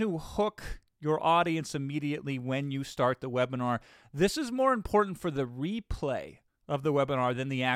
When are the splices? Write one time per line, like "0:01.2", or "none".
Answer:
none